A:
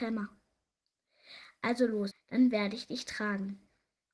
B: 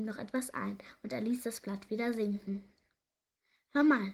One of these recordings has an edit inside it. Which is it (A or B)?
A